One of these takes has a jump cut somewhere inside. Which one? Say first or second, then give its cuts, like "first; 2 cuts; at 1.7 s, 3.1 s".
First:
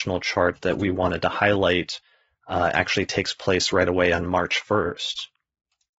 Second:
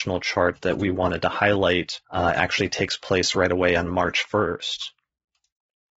second; 1 cut; at 2.0 s